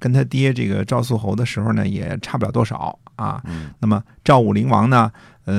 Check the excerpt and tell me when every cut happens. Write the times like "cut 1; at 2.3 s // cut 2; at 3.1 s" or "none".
none